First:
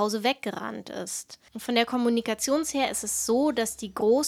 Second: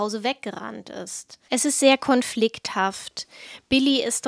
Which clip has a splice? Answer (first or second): second